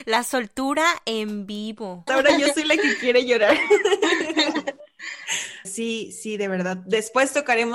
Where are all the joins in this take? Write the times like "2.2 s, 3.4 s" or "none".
2.1 s, 5.6 s